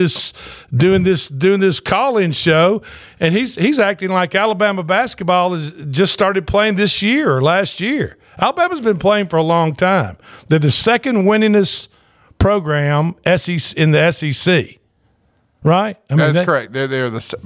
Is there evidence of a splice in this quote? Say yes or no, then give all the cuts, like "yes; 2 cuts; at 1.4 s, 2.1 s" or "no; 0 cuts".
no; 0 cuts